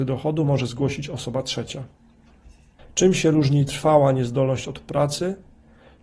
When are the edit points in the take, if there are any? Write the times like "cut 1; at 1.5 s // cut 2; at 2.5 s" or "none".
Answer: cut 1; at 2.8 s